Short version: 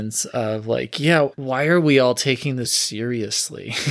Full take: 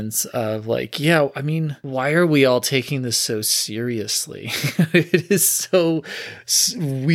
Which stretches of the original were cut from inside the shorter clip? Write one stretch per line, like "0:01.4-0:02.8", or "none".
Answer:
0:01.3-0:01.8
0:03.1-0:03.4